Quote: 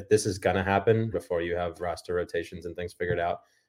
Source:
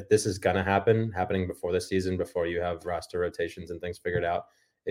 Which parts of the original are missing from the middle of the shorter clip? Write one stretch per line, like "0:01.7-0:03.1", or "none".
0:01.1-0:02.2